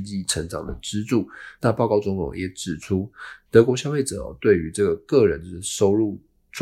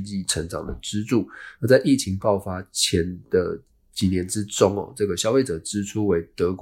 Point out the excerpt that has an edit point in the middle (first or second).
first